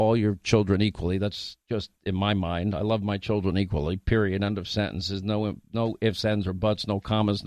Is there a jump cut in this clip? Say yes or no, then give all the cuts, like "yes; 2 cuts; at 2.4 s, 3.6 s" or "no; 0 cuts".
no; 0 cuts